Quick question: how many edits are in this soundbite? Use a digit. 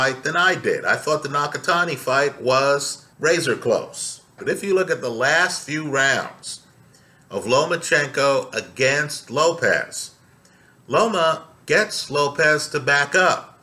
2